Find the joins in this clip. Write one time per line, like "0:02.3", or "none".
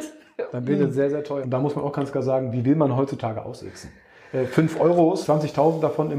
0:01.4
0:05.2